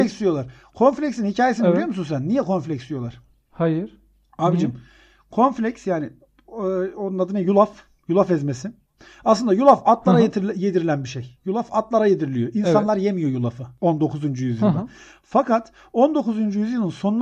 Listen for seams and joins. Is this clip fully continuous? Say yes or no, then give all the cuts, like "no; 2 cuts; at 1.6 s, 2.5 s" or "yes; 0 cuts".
yes; 0 cuts